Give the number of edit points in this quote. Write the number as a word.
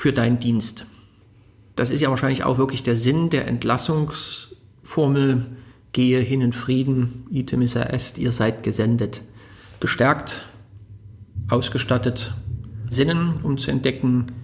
one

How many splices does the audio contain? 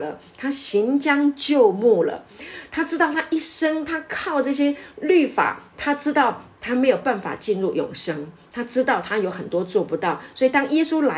zero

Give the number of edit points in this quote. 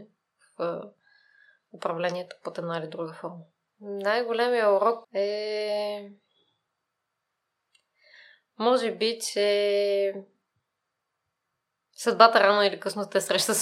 two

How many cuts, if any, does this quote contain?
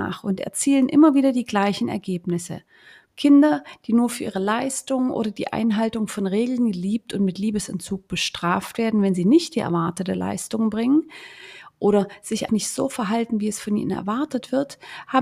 two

